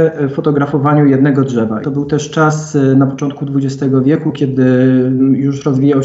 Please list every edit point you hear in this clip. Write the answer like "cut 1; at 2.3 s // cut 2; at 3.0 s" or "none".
cut 1; at 1.8 s